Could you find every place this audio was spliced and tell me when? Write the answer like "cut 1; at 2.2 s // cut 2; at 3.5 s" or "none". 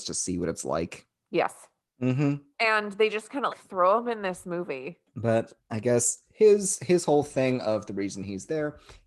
cut 1; at 1.9 s // cut 2; at 3.5 s